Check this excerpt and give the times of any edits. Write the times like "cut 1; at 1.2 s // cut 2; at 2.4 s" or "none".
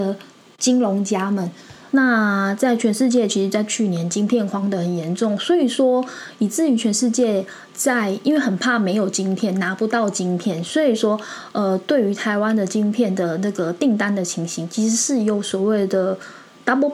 cut 1; at 1.9 s